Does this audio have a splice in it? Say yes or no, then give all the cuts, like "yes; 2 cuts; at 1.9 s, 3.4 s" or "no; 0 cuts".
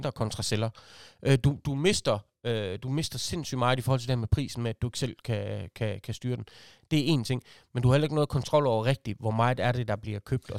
no; 0 cuts